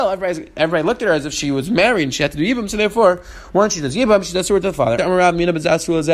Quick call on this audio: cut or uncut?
cut